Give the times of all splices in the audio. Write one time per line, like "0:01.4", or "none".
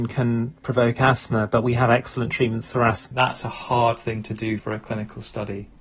0:03.1
0:04.6